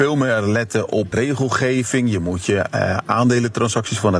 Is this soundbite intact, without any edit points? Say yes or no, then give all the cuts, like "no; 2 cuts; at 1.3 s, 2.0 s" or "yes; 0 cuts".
no; 1 cut; at 1.1 s